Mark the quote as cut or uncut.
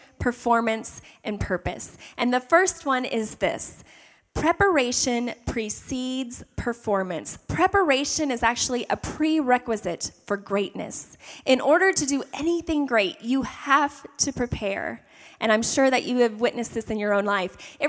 uncut